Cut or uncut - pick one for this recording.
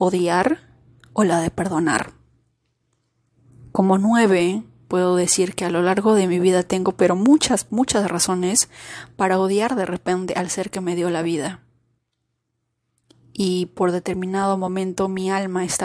uncut